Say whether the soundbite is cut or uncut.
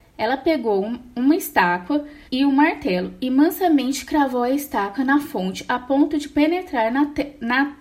cut